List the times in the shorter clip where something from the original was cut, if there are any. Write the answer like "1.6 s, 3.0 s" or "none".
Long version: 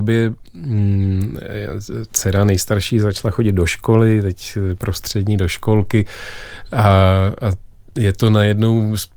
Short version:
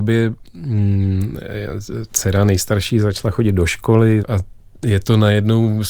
4.2 s

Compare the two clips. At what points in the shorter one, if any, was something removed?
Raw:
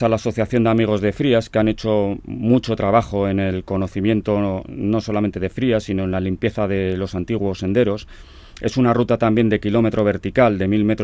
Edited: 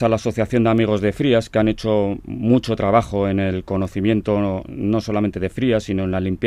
none

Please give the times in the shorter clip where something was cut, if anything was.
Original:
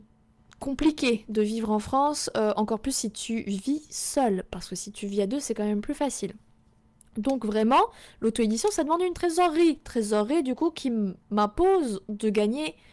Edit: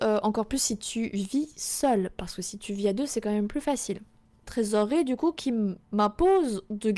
4.4 s

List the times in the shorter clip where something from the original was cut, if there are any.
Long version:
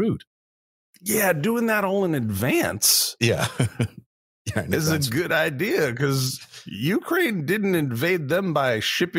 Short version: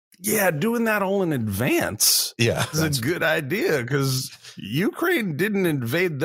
2.7 s

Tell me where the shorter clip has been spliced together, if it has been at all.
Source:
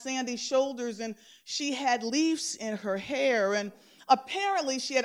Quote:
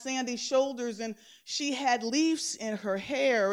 none

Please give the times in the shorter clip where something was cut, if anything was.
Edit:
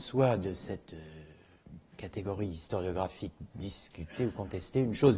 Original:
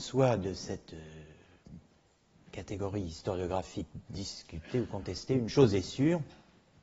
1.9 s

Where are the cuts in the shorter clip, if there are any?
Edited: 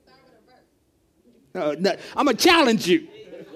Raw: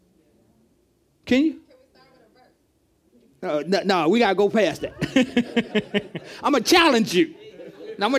1.9 s

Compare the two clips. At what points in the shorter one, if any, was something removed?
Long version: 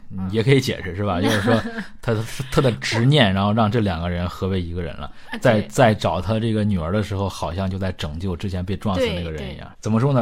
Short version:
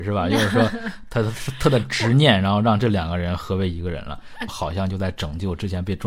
4.5 s

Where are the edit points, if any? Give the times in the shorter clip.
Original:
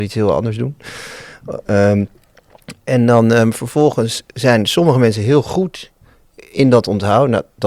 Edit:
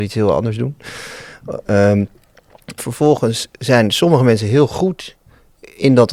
2.8 s

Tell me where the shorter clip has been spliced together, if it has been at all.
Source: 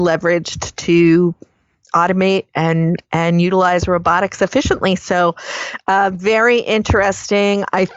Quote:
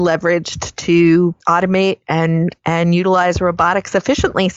1.4 s

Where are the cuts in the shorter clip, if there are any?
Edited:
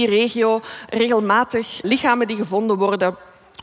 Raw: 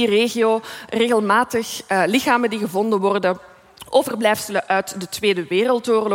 1.8 s

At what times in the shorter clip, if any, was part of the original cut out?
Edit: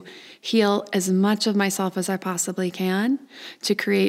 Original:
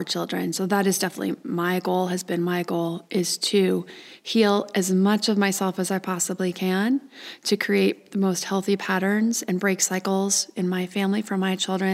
none

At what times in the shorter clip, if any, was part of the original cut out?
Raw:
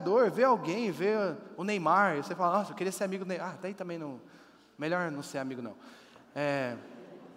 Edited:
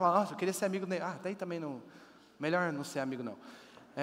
none

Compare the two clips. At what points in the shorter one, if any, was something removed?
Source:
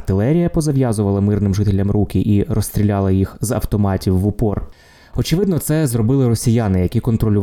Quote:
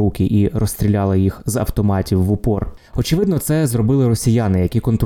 2.9 s

